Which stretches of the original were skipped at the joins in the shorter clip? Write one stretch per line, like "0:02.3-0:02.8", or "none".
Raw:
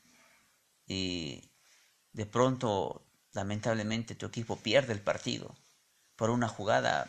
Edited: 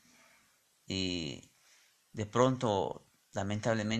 none